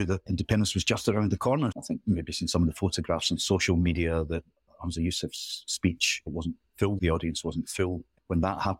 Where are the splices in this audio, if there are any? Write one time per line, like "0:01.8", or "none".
0:01.7
0:07.0